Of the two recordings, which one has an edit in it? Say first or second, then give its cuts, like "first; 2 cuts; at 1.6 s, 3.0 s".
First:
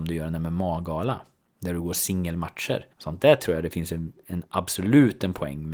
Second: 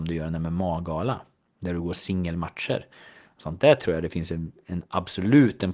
first; 1 cut; at 2.9 s